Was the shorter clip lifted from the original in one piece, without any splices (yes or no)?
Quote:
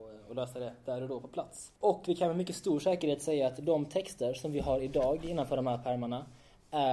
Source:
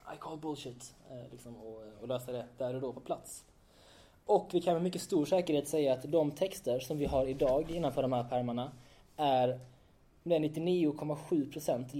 no